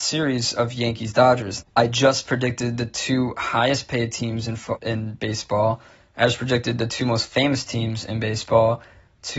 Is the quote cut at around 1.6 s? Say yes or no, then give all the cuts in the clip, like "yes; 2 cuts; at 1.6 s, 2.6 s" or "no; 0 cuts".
yes; 2 cuts; at 1.6 s, 4.8 s